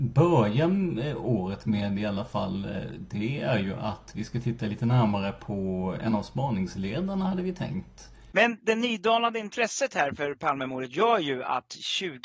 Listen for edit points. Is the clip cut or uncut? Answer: cut